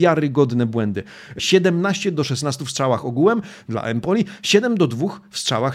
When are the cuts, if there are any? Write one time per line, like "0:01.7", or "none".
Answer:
0:01.4